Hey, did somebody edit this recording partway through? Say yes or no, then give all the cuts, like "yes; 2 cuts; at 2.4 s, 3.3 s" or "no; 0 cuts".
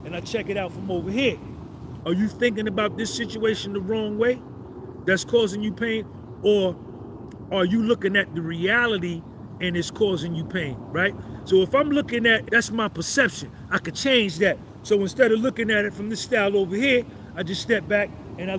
yes; 2 cuts; at 2.0 s, 12.5 s